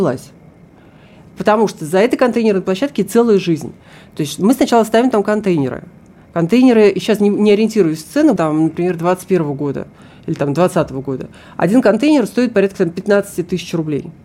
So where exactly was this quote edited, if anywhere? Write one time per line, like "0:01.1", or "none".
0:08.4